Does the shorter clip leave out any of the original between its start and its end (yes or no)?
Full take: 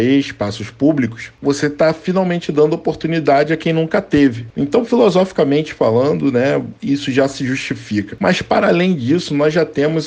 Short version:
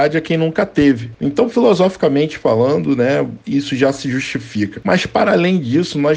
no